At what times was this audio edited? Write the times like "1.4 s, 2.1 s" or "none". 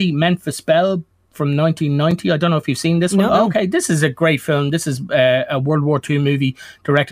3.3 s